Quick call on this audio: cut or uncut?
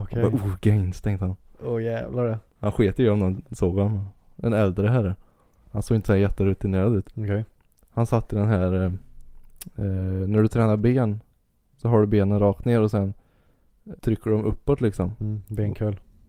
cut